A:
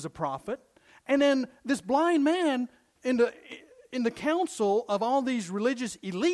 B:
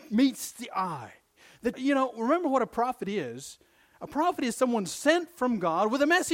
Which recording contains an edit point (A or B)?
B